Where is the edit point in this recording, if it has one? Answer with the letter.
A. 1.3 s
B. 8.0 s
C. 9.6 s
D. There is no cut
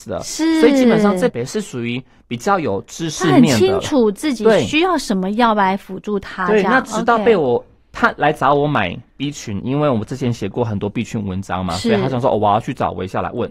A